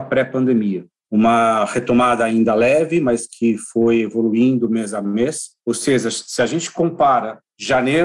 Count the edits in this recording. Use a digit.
2